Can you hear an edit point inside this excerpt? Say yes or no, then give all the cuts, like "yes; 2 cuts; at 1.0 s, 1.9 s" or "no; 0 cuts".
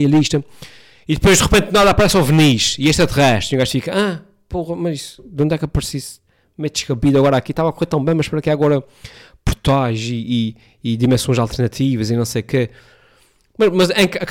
no; 0 cuts